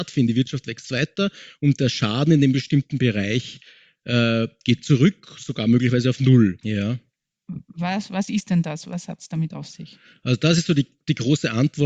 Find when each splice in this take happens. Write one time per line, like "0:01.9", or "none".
0:06.6